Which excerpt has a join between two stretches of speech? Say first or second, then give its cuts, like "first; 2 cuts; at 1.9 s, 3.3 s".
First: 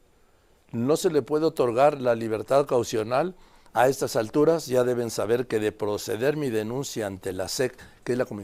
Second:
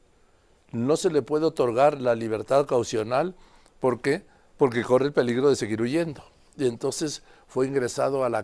first; 1 cut; at 3.7 s